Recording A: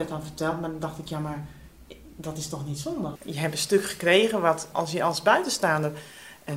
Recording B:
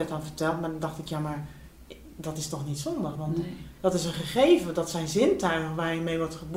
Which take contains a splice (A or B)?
A